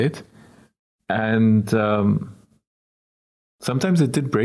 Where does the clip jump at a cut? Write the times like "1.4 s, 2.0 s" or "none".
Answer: none